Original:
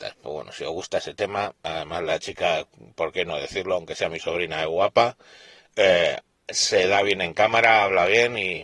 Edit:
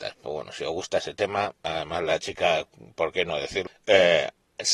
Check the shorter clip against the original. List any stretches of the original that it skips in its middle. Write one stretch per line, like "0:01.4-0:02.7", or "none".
0:03.7-0:05.6